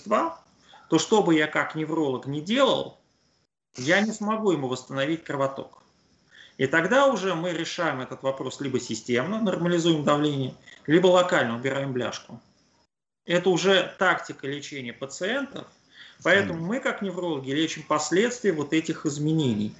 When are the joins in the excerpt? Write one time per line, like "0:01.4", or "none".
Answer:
none